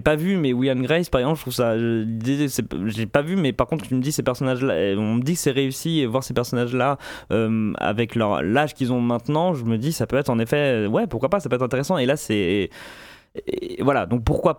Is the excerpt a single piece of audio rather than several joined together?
yes; 0 cuts

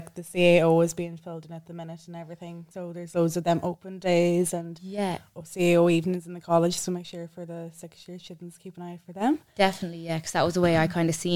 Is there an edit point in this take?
yes; 1 cut; at 2.7 s

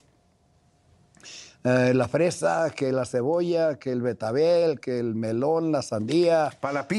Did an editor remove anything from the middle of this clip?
no; 0 cuts

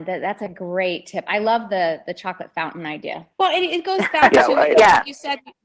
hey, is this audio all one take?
no; 1 cut; at 3.3 s

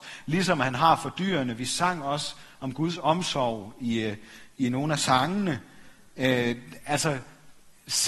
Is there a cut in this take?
no; 0 cuts

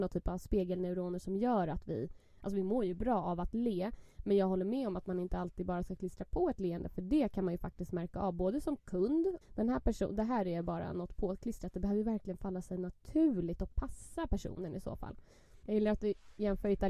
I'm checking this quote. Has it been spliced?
yes; 2 cuts; at 9.4 s, 15.6 s

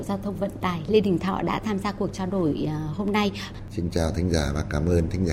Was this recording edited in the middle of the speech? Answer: no; 0 cuts

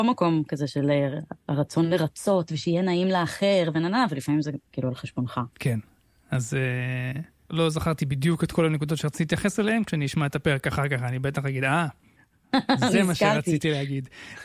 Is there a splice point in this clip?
yes; 1 cut; at 5.5 s

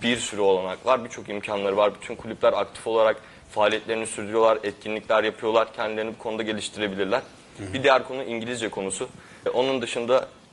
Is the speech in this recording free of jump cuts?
no; 1 cut; at 9.5 s

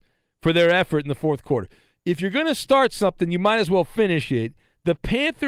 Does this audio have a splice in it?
no; 0 cuts

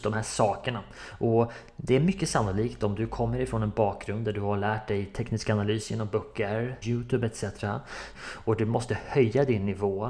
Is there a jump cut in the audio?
yes; 2 cuts; at 6.8 s, 8.1 s

